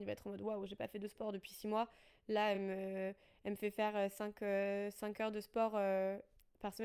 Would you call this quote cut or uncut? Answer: uncut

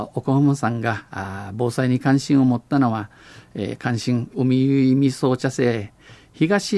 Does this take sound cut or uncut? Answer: cut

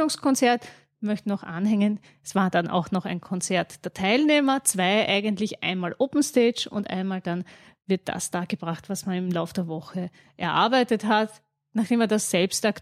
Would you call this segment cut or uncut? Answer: uncut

